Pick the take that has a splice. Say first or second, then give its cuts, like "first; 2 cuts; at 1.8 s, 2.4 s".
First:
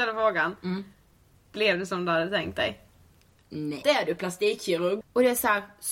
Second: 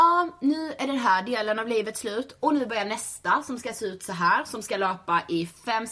first; 2 cuts; at 3.8 s, 5.0 s